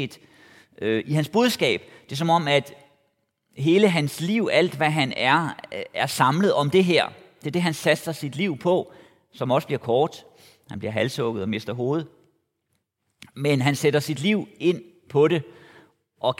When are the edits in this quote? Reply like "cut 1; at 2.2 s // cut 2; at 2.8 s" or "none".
none